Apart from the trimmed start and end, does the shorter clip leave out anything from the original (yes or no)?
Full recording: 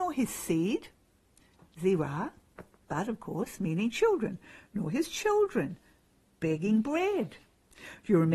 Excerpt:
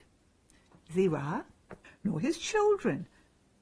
yes